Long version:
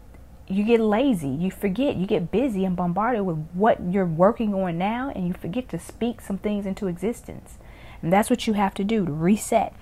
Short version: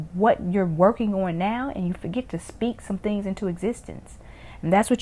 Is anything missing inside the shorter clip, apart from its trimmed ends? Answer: no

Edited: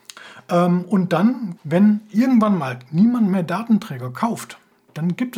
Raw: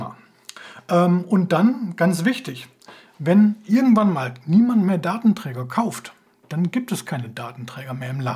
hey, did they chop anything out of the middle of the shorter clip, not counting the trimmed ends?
yes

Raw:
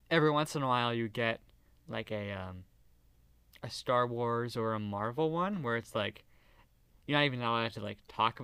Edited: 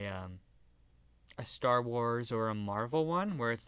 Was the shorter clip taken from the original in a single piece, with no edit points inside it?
yes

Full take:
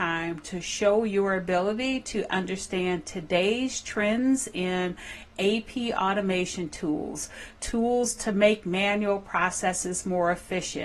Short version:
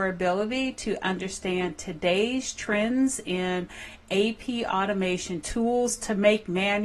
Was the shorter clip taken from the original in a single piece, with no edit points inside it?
no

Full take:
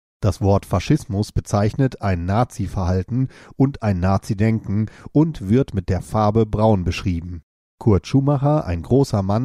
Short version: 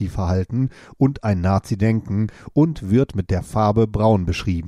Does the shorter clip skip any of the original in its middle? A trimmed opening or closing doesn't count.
no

